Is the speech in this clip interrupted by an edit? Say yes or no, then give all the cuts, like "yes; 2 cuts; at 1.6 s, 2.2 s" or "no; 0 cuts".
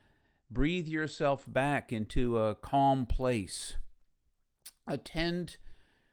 no; 0 cuts